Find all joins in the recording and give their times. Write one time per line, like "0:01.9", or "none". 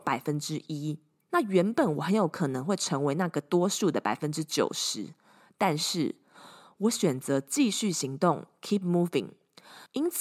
none